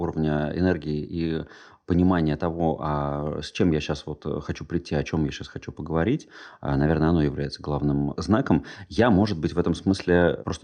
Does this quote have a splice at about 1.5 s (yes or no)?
no